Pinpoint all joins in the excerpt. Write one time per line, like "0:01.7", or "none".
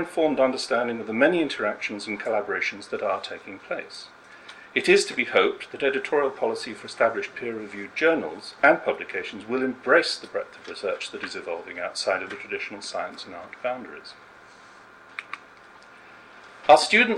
none